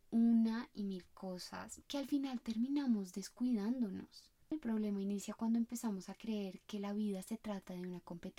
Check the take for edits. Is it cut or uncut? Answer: cut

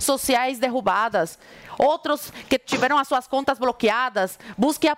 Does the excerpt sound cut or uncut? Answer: uncut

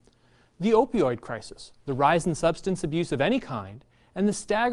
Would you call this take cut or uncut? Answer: uncut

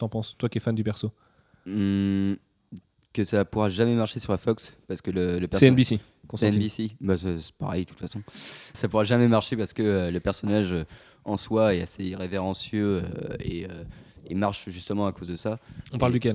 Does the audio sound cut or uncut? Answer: cut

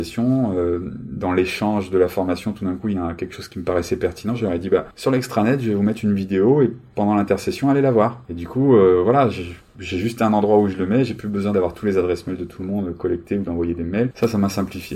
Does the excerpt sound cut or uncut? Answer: uncut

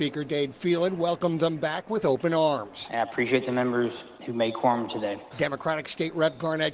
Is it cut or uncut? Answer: cut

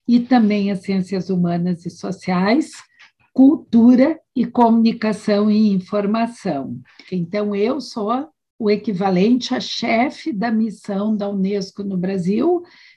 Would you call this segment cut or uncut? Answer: cut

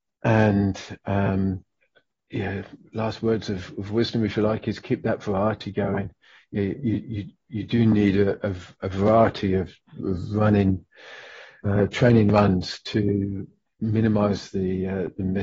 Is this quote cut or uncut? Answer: uncut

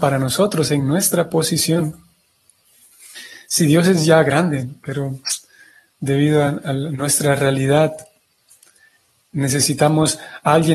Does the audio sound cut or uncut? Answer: uncut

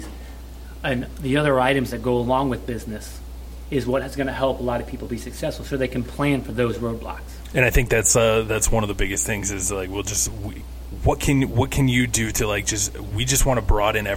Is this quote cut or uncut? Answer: uncut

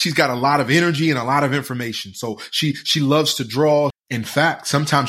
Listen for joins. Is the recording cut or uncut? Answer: cut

